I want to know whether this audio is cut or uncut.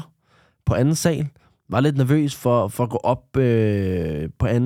uncut